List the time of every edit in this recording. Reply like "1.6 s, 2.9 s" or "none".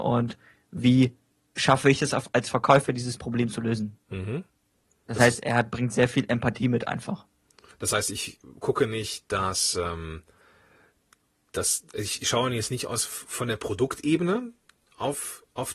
none